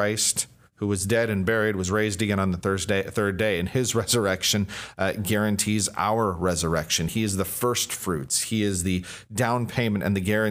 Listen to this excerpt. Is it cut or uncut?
uncut